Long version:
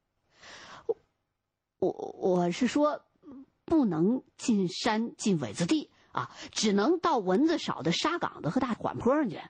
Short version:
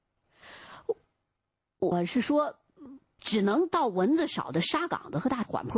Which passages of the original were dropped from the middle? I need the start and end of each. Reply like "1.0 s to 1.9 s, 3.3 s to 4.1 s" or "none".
1.9 s to 2.4 s, 3.7 s to 6.5 s